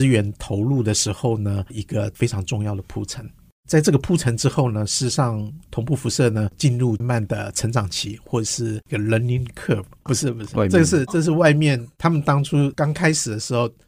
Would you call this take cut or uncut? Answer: cut